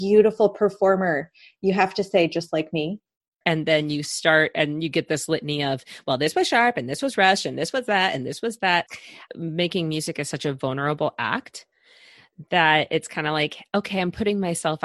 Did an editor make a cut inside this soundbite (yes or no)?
yes